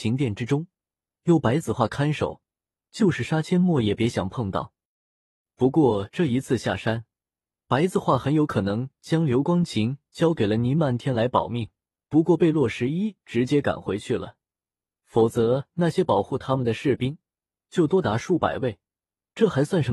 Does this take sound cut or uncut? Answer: cut